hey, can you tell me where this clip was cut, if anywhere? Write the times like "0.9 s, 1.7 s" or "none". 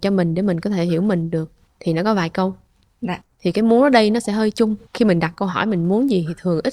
3.2 s